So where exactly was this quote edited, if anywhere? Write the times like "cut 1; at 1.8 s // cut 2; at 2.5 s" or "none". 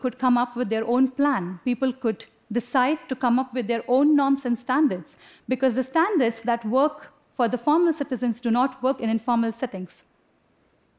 none